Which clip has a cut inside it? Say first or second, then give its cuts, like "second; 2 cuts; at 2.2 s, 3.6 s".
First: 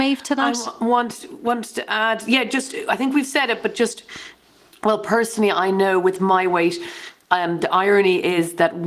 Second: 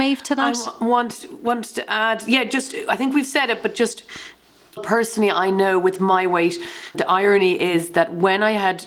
second; 2 cuts; at 4.8 s, 6.9 s